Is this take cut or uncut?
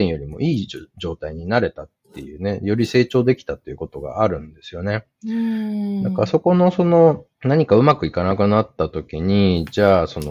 cut